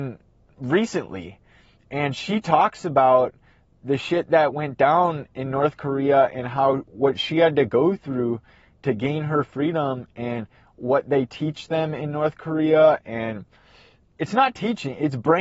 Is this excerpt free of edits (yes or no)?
yes